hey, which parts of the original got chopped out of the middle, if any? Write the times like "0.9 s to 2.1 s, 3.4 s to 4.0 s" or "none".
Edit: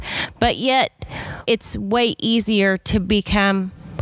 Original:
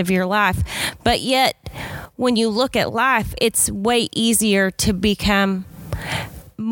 2.1 s to 3.4 s